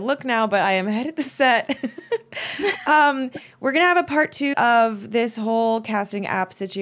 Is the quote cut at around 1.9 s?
no; 1 cut; at 4.5 s

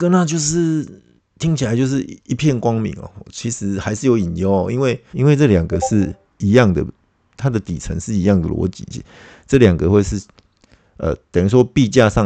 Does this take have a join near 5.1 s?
yes; 2 cuts; at 2.2 s, 5.1 s

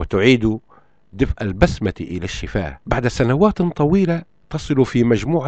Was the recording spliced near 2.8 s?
yes; 1 cut; at 2.8 s

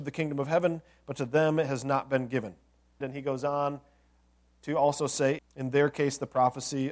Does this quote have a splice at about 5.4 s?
yes; 2 cuts; at 3.0 s, 5.4 s

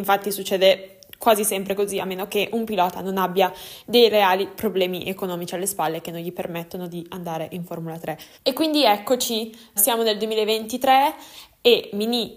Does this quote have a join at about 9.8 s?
yes; 2 cuts; at 8.3 s, 9.8 s

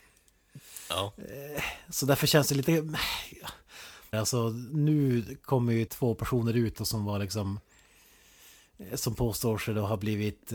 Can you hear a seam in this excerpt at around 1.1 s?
no; 2 cuts; at 4.1 s, 5.9 s

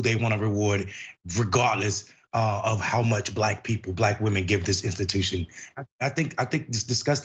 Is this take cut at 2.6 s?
no; 1 cut; at 5.7 s

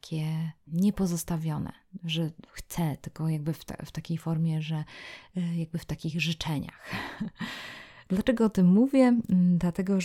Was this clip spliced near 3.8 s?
no; 0 cuts

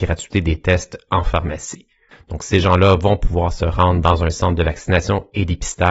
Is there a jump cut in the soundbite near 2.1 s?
yes; 1 cut; at 2.1 s

